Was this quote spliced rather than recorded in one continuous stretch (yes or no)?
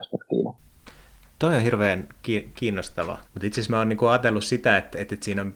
yes